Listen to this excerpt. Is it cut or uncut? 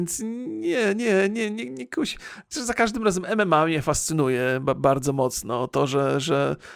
uncut